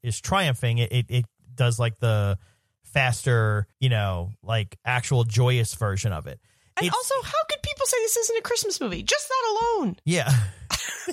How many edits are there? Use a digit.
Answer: 1